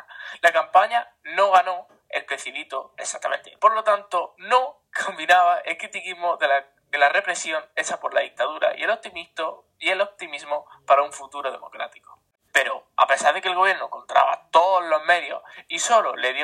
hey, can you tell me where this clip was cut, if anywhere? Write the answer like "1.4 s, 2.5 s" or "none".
3.6 s, 12.5 s